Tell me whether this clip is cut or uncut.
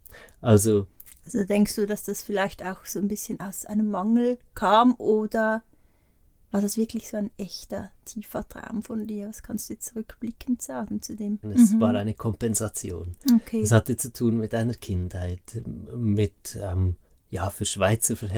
cut